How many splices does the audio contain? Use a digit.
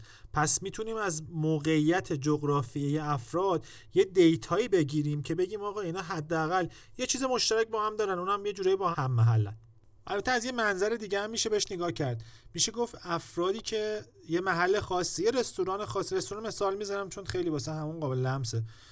1